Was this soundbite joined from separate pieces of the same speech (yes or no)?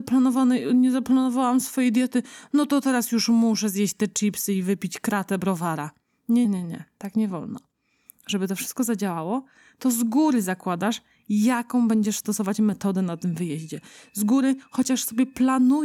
yes